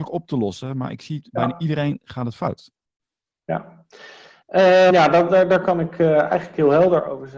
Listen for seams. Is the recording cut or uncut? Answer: cut